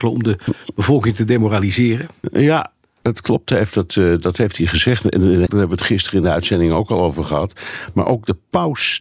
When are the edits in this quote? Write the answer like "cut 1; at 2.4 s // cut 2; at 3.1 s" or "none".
cut 1; at 5.5 s